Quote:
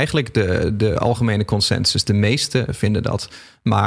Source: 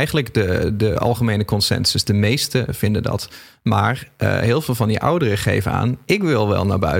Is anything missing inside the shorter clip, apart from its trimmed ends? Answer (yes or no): no